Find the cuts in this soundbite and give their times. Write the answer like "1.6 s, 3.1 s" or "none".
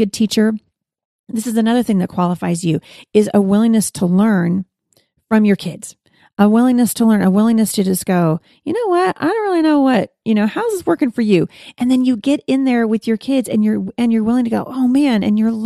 none